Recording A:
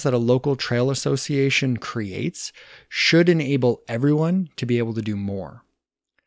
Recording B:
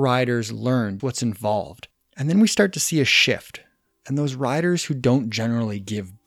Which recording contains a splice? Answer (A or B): B